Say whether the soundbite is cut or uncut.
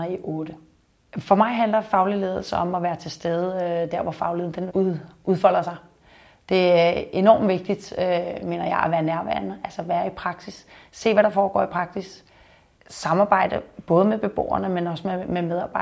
cut